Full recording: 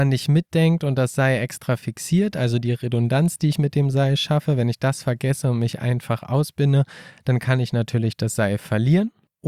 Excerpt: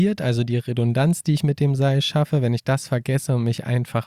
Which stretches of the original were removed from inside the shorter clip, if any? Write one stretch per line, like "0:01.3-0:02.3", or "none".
none